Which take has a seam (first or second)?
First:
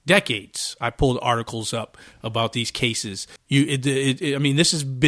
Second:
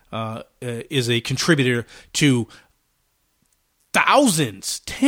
first